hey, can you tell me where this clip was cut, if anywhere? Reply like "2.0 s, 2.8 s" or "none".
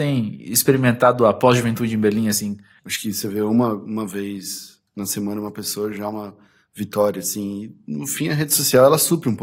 2.8 s